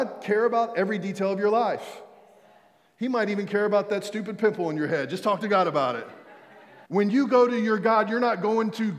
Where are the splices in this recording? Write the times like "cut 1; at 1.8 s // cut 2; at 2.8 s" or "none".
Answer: cut 1; at 6.9 s